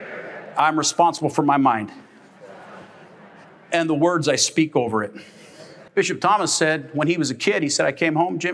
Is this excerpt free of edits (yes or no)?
no